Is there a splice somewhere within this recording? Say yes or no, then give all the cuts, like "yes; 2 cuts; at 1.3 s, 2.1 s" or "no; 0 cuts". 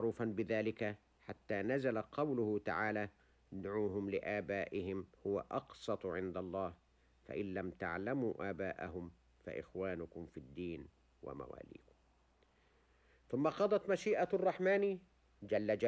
yes; 1 cut; at 5.2 s